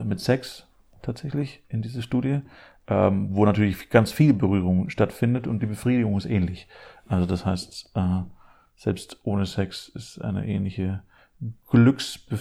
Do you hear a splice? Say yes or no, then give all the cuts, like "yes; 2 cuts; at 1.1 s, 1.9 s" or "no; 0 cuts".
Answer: no; 0 cuts